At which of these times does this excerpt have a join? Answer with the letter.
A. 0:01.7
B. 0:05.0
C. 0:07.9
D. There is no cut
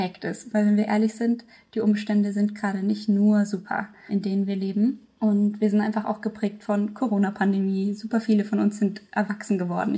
D